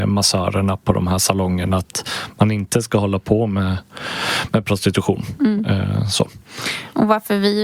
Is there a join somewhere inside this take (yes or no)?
no